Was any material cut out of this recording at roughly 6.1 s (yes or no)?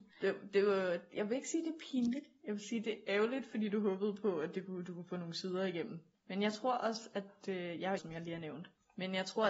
yes